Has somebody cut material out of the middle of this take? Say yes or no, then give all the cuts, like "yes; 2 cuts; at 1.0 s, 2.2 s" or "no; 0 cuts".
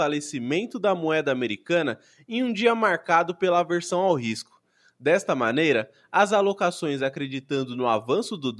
no; 0 cuts